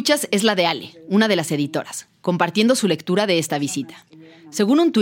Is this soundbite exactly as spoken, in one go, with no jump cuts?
yes; 0 cuts

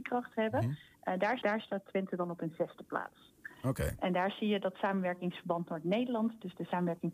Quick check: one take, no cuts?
no; 1 cut; at 1.4 s

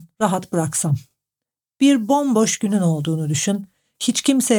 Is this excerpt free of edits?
yes; 0 cuts

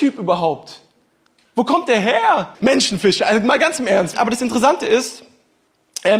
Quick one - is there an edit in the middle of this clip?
yes; 2 cuts; at 2.5 s, 4.1 s

